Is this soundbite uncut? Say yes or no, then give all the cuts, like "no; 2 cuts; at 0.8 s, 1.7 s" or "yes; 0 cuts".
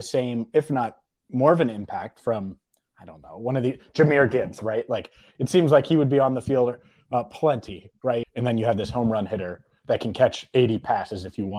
no; 2 cuts; at 5.3 s, 8.2 s